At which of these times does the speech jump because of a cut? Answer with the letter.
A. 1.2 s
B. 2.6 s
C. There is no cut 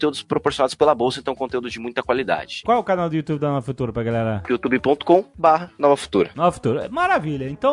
B